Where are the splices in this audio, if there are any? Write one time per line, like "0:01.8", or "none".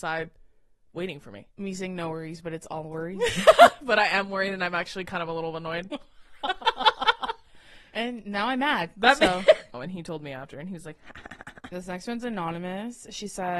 0:09.7
0:11.7